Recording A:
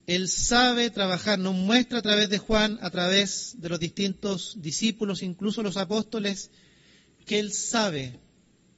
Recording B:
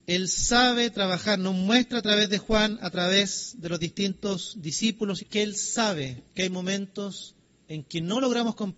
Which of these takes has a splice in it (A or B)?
B